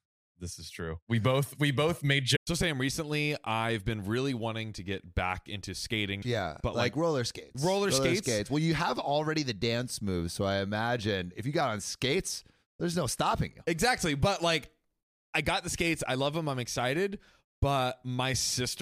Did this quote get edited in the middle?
yes; 1 cut; at 6.2 s

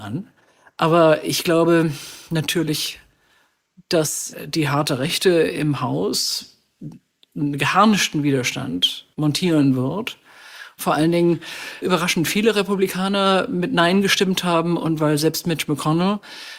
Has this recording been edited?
yes; 3 cuts; at 9.1 s, 10.8 s, 11.8 s

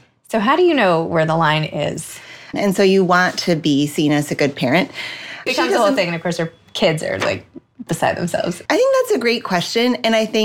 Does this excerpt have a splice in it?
yes; 3 cuts; at 2.5 s, 5.5 s, 8.7 s

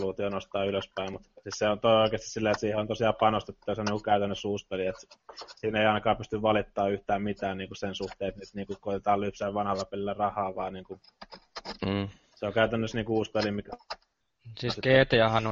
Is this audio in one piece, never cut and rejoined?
yes; 0 cuts

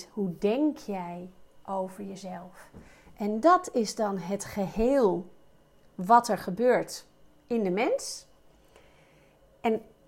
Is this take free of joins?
yes; 0 cuts

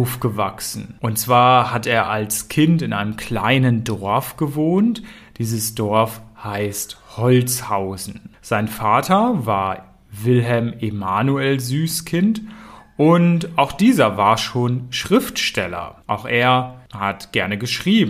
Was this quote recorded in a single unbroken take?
yes; 0 cuts

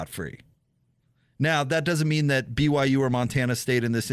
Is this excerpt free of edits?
yes; 0 cuts

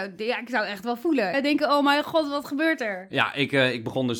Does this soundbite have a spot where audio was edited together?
yes; 1 cut; at 1.3 s

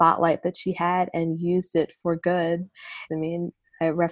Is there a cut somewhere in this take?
yes; 1 cut; at 3.1 s

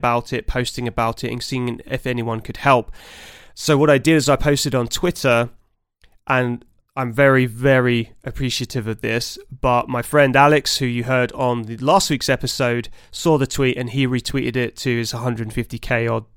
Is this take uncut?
yes; 0 cuts

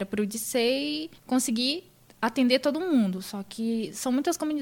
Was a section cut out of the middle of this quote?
yes; 1 cut; at 1.2 s

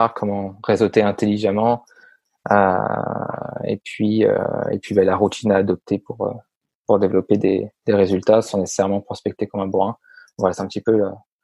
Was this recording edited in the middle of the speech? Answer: no; 0 cuts

